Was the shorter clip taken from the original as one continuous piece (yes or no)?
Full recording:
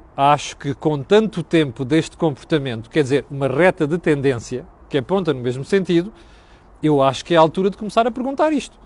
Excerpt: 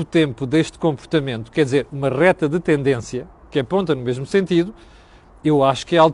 yes